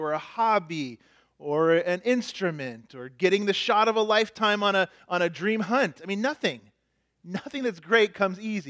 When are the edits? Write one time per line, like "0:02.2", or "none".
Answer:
none